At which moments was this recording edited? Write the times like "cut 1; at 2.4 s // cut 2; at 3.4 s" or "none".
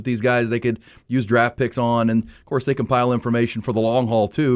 none